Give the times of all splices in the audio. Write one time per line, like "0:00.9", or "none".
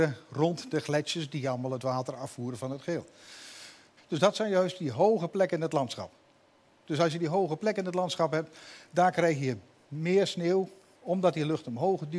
0:04.0